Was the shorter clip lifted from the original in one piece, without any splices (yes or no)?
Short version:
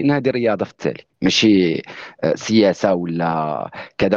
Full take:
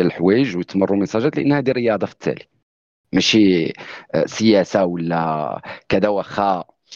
no